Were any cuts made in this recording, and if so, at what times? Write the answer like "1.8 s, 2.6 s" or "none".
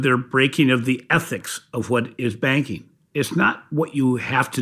3.1 s